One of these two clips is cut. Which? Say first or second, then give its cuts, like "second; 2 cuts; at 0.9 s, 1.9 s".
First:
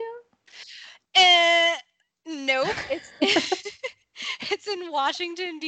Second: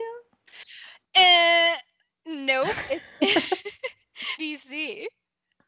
second; 1 cut; at 4.4 s